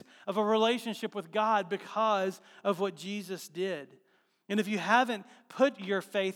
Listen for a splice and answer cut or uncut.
uncut